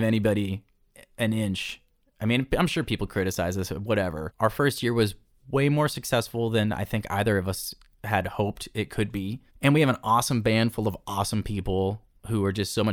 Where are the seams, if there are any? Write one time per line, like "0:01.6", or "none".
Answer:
0:04.3
0:09.5